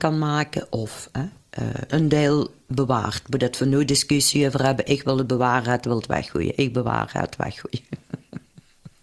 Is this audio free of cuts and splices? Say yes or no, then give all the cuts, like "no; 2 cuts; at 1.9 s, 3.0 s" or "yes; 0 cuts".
no; 1 cut; at 1.9 s